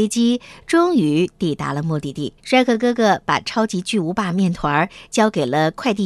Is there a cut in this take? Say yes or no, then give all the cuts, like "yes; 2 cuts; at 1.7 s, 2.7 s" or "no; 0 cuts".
yes; 1 cut; at 2.4 s